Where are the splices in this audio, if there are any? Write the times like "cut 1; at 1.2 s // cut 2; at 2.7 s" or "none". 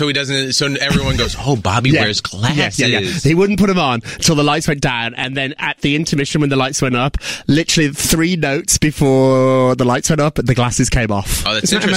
none